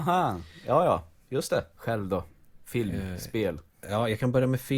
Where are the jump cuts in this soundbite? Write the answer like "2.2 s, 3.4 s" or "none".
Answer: 1.8 s